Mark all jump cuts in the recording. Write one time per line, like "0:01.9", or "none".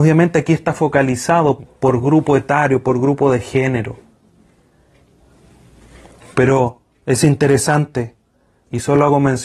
0:01.6

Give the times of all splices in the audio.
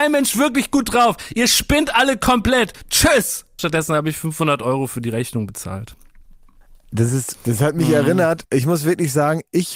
0:03.6
0:07.3

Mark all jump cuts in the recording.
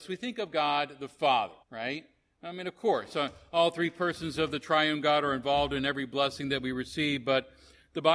0:01.6

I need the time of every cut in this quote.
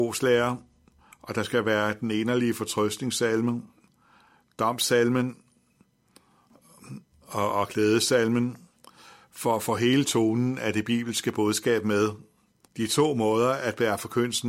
0:07.5
0:12.7

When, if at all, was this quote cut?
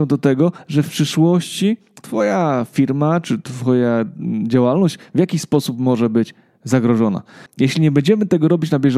0:07.5

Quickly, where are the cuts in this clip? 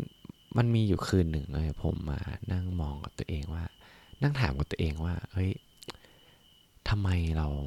none

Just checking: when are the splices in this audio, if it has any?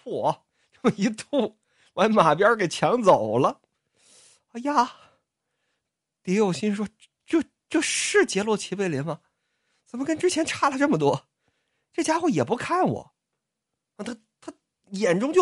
none

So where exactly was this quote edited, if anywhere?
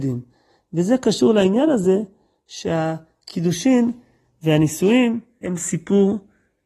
0:05.4

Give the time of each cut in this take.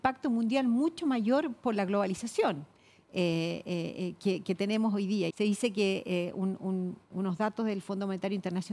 0:05.3

